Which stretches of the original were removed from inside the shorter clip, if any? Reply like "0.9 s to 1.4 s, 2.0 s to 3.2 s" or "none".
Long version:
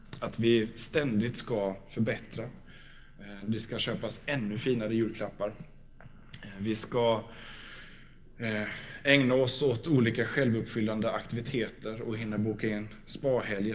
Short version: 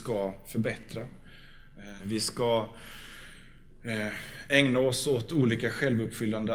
3.4 s to 6.5 s